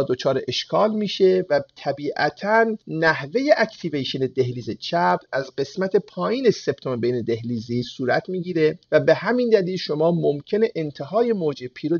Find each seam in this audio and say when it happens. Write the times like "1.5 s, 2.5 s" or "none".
8.8 s